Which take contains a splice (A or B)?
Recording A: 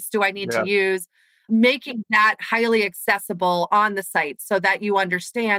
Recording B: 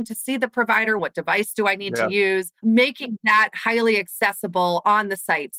B